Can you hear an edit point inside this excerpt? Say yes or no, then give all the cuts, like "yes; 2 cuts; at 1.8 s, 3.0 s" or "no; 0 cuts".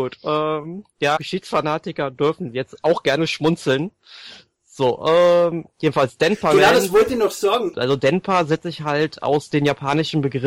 yes; 2 cuts; at 1.2 s, 7.7 s